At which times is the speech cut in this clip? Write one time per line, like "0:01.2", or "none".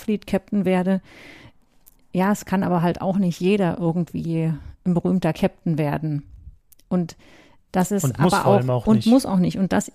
none